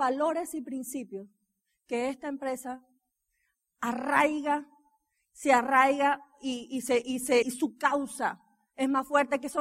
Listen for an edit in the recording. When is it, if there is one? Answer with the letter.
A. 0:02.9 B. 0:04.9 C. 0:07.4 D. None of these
C